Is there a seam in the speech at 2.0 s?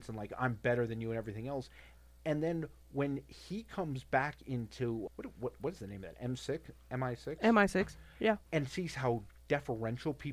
no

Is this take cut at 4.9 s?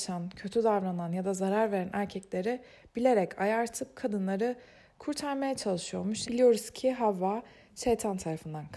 no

